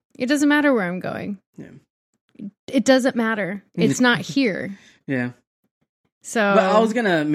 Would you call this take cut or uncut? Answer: uncut